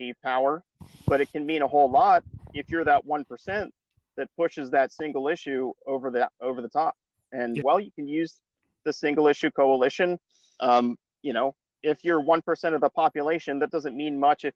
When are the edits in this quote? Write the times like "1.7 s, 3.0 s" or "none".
7.6 s